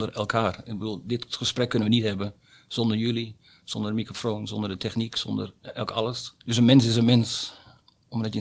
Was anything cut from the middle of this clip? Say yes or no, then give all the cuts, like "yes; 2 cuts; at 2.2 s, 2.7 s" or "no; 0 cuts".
yes; 1 cut; at 6.4 s